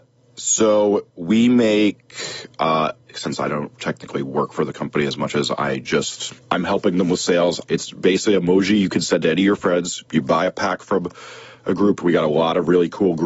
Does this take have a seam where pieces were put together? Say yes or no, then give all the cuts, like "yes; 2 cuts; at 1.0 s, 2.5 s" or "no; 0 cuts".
yes; 3 cuts; at 3.1 s, 6.4 s, 7.6 s